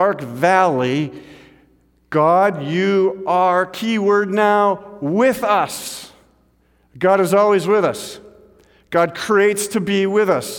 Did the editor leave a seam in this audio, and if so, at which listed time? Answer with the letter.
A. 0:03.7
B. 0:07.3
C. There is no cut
C